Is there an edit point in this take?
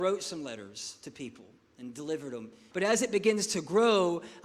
yes; 1 cut; at 2.7 s

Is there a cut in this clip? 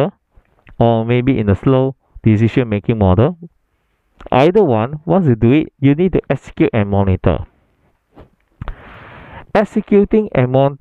no; 0 cuts

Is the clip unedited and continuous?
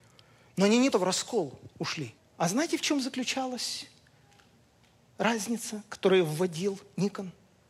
no; 2 cuts; at 0.9 s, 2.2 s

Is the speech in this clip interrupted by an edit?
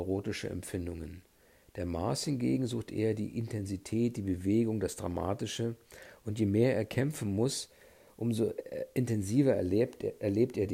no; 0 cuts

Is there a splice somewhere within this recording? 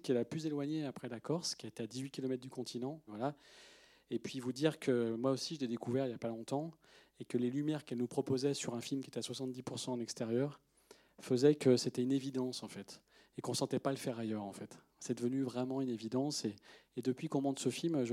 yes; 1 cut; at 3.1 s

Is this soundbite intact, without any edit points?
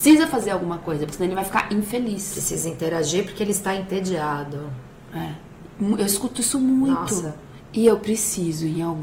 no; 1 cut; at 7.6 s

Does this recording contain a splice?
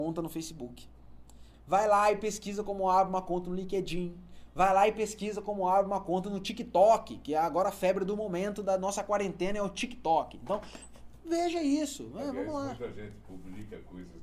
yes; 1 cut; at 1.5 s

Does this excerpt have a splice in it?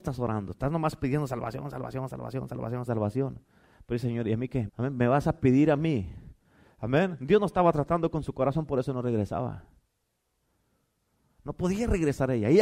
yes; 2 cuts; at 2.9 s, 4.7 s

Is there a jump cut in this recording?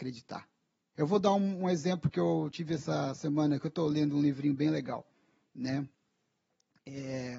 yes; 1 cut; at 0.9 s

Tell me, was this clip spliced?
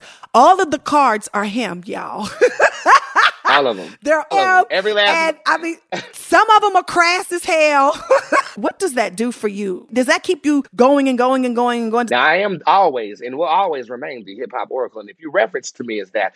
yes; 3 cuts; at 4.3 s, 8.5 s, 12.1 s

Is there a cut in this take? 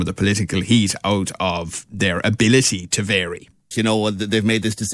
yes; 1 cut; at 3.7 s

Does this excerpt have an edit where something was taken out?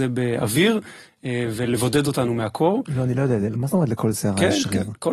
no; 0 cuts

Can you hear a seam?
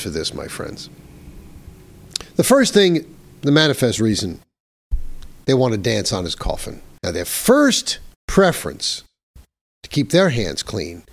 yes; 2 cuts; at 7.0 s, 8.2 s

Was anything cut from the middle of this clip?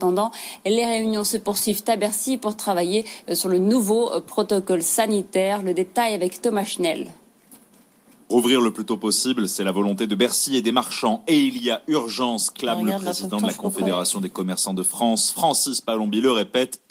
no; 0 cuts

